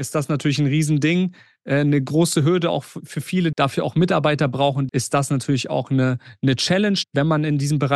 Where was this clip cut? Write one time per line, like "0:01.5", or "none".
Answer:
0:03.5
0:04.9
0:07.0